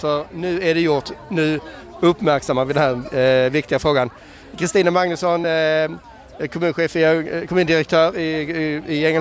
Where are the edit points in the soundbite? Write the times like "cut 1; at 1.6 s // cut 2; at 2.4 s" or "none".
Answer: none